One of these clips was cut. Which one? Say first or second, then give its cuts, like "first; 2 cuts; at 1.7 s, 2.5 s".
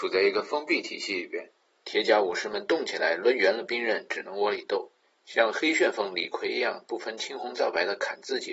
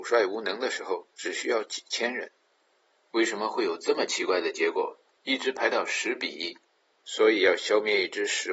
second; 2 cuts; at 5.2 s, 6.9 s